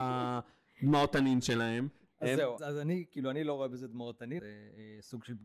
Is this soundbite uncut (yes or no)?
no